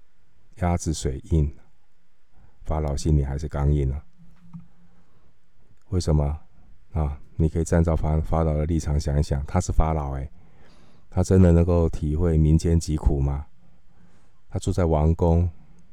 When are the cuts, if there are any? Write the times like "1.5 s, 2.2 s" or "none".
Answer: none